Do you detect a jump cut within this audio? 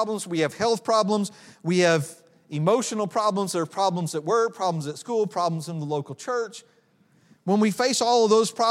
no; 0 cuts

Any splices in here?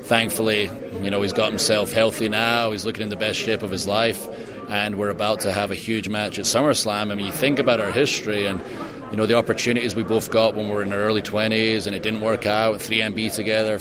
no; 0 cuts

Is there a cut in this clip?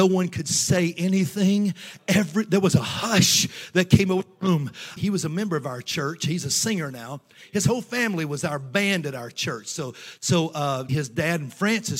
yes; 2 cuts; at 5.0 s, 10.9 s

